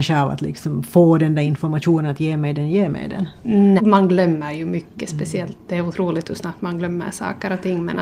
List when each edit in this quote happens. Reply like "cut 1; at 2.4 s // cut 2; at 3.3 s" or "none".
cut 1; at 3.8 s